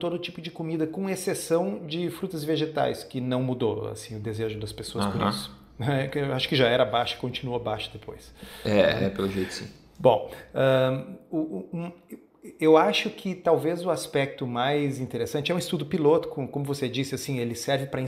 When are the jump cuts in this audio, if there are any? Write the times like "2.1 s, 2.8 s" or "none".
none